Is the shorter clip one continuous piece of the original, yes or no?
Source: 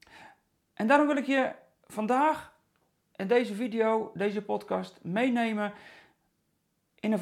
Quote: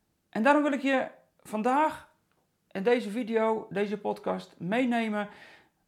yes